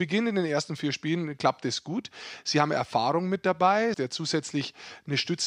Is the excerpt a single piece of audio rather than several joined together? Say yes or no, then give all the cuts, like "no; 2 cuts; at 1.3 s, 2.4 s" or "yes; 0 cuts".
no; 1 cut; at 3.9 s